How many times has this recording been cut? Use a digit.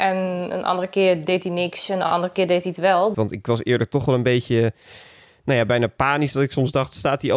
1